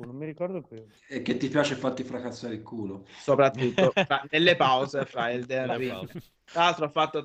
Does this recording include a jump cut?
yes; 1 cut; at 1.0 s

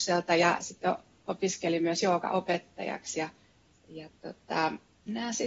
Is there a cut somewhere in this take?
no; 0 cuts

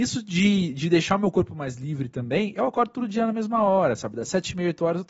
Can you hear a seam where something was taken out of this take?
no; 0 cuts

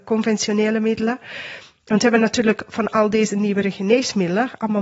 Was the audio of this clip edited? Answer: yes; 1 cut; at 1.7 s

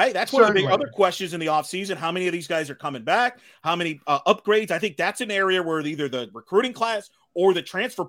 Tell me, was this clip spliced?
no; 0 cuts

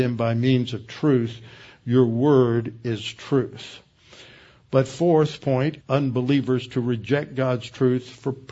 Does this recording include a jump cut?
yes; 1 cut; at 5.8 s

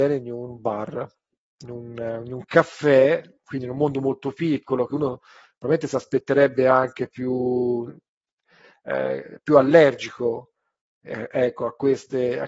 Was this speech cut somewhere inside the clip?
no; 0 cuts

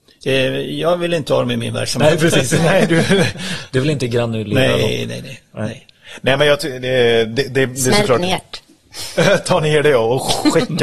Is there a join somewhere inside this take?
no; 0 cuts

